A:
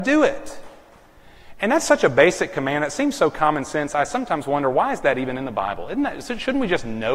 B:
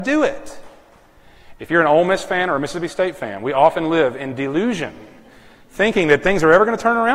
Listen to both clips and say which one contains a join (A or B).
B